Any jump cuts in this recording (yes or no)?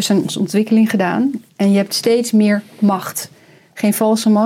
no